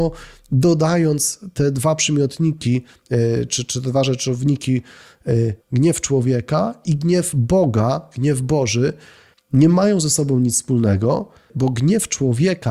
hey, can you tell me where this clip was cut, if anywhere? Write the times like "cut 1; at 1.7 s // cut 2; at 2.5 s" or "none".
cut 1; at 3.5 s // cut 2; at 5.6 s